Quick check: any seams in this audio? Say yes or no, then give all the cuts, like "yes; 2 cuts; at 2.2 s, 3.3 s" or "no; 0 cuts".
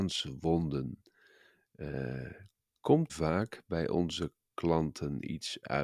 yes; 1 cut; at 3.1 s